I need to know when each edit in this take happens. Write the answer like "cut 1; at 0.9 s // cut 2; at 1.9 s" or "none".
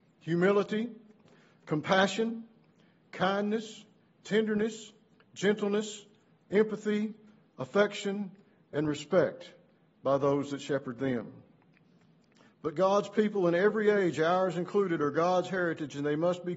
cut 1; at 12.5 s